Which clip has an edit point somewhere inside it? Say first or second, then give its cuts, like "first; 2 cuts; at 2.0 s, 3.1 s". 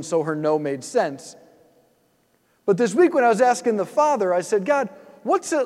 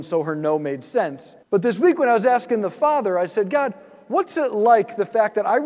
second; 1 cut; at 1.4 s